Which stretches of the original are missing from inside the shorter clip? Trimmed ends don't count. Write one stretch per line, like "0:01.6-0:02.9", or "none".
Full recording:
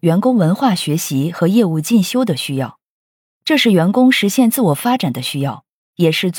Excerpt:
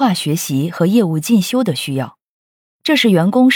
none